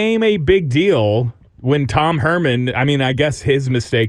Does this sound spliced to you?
yes; 1 cut; at 2.7 s

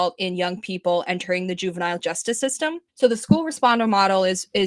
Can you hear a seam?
yes; 1 cut; at 2.9 s

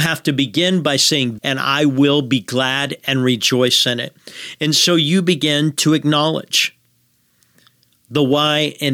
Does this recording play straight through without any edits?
no; 1 cut; at 1.4 s

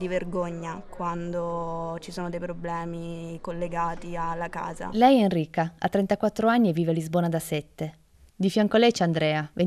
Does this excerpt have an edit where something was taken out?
yes; 1 cut; at 8.3 s

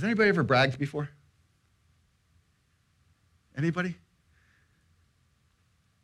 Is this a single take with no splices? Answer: yes; 0 cuts

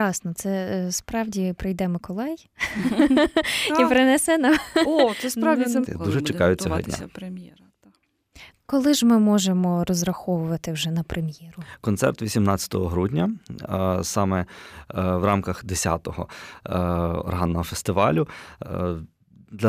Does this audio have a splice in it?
yes; 1 cut; at 5.8 s

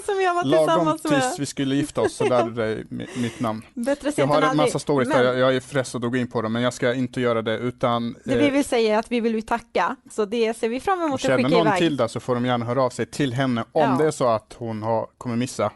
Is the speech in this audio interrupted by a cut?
yes; 1 cut; at 10.1 s

